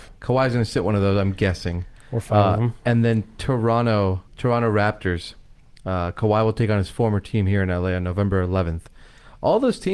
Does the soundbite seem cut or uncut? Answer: cut